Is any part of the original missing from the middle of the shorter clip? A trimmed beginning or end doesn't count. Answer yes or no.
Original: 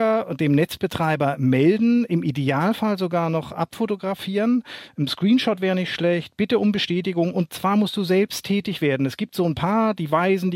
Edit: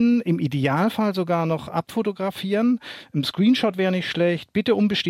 no